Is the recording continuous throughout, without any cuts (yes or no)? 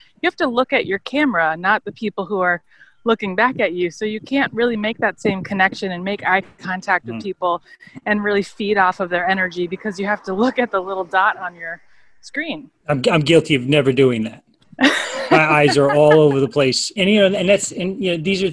no